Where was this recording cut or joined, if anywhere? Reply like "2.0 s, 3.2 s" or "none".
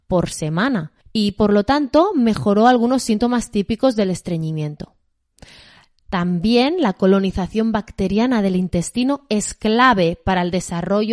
1.0 s

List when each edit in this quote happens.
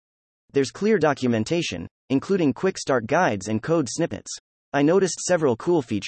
none

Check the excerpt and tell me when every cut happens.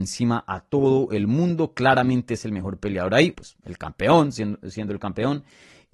3.3 s

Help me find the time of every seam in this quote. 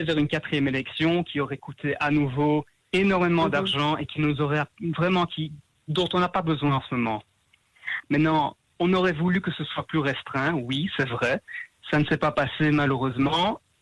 8.0 s

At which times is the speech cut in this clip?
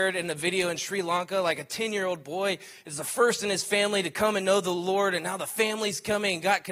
none

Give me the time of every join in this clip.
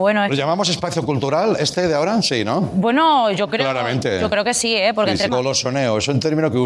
5.3 s

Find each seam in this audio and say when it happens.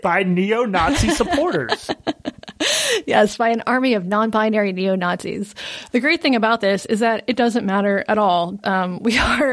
5.9 s, 8.6 s

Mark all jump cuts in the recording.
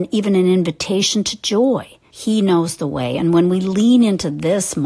2.1 s

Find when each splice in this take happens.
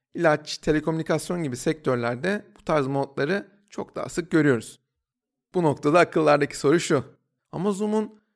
7.4 s

